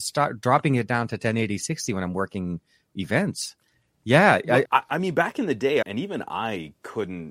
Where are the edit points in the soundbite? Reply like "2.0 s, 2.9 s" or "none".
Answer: 4.6 s, 5.8 s